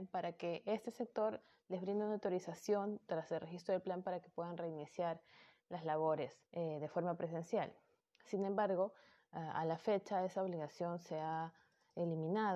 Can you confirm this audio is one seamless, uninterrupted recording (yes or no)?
no